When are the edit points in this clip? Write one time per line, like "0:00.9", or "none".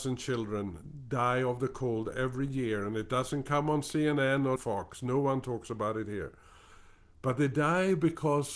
0:04.6

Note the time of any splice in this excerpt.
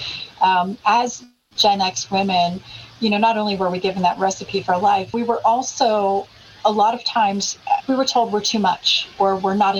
0:05.1
0:07.8

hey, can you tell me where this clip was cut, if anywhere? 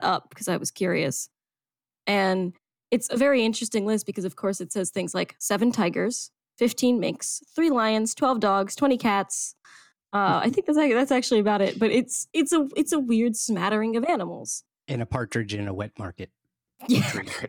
none

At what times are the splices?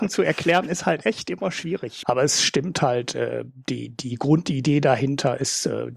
0:02.0

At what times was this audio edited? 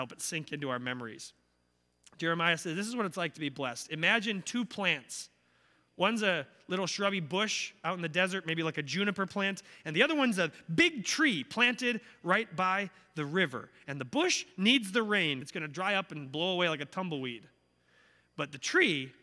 0:15.4

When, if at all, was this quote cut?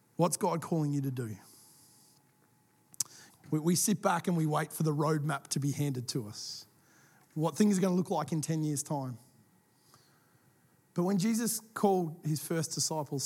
0:03.3

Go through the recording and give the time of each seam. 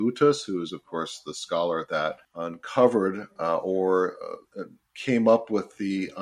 0:02.2
0:04.5

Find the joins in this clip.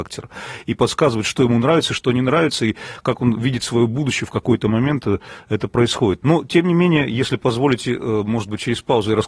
0:06.2

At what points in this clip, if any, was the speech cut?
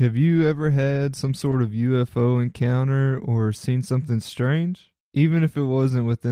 none

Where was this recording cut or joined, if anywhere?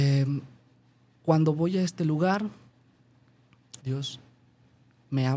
0:03.8

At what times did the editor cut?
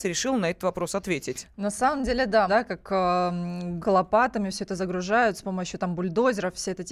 0:02.5
0:03.8

